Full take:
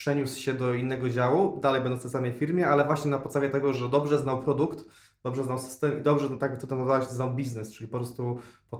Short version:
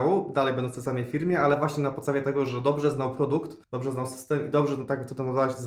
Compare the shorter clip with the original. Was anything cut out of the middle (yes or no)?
yes